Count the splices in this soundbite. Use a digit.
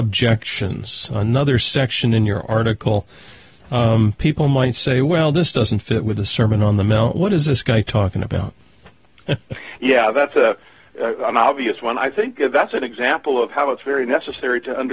0